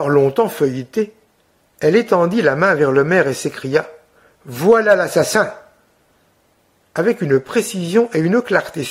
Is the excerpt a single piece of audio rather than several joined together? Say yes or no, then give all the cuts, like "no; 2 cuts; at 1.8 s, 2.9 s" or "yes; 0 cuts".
no; 1 cut; at 6.8 s